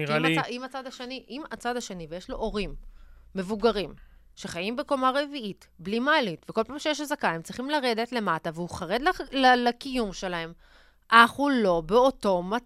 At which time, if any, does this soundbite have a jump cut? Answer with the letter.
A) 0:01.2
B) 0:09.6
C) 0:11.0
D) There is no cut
D